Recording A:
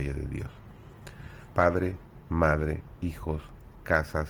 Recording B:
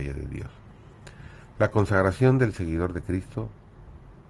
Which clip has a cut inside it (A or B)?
A